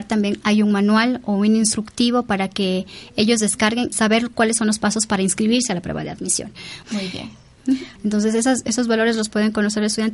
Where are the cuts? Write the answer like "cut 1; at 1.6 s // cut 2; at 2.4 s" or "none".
cut 1; at 3.9 s // cut 2; at 6.8 s // cut 3; at 8.0 s